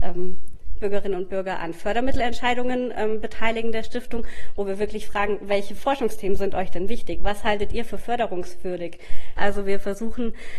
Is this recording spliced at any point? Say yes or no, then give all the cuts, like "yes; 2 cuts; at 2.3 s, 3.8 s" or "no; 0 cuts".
yes; 1 cut; at 9.4 s